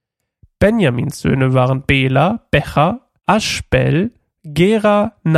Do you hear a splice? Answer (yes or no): yes